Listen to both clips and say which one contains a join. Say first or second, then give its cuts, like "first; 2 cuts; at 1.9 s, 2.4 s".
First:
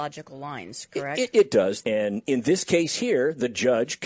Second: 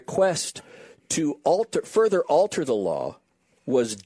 first; 1 cut; at 1.8 s